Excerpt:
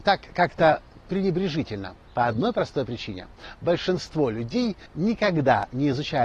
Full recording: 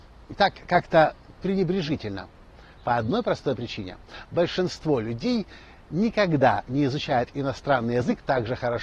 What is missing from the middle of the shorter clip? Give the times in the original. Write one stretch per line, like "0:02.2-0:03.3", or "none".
0:02.4-0:02.7
0:05.6-0:05.8